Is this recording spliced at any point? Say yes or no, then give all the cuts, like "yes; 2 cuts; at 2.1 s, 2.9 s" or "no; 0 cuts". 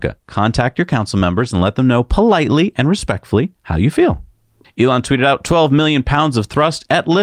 no; 0 cuts